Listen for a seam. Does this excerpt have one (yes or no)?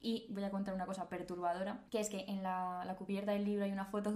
yes